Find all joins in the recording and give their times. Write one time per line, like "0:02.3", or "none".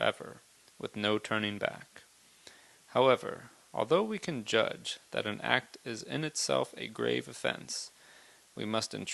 none

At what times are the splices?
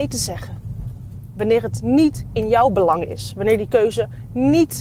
none

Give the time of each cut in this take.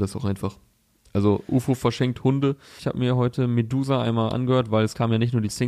0:02.8

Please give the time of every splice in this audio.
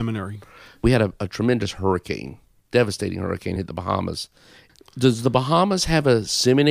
none

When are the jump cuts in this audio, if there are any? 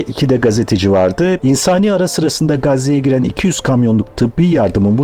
0:01.4

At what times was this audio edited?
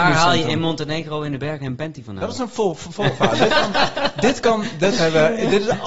none

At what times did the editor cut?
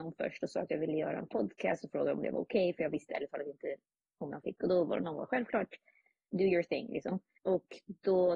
0:07.4

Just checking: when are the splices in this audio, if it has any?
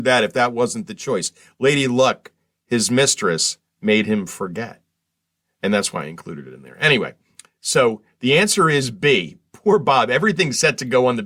none

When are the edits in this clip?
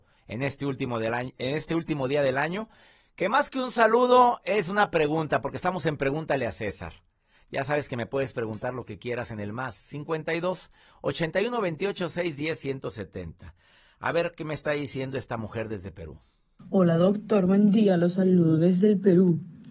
none

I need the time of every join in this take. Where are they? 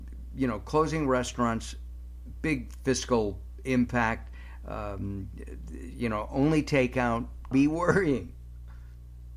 0:07.5

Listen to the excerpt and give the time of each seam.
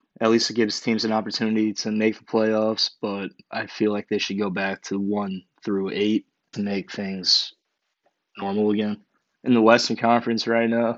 0:06.5

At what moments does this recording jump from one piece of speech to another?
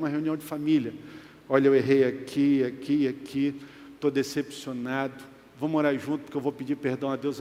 none

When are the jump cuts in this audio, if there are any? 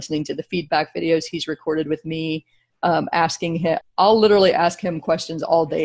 0:03.8

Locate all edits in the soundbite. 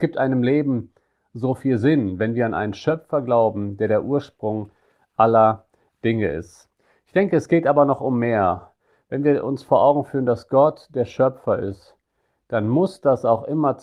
none

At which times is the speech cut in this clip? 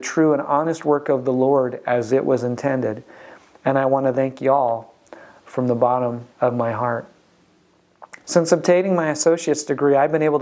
0:06.3
0:08.2

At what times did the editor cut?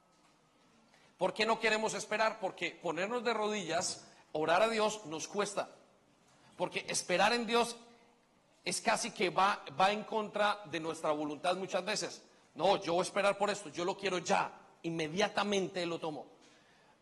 none

